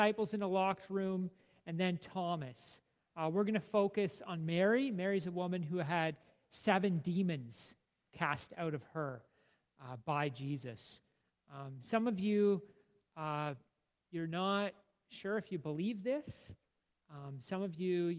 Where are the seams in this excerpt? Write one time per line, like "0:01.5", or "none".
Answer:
none